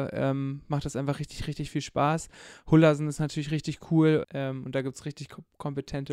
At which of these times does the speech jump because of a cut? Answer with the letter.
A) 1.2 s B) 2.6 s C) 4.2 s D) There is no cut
C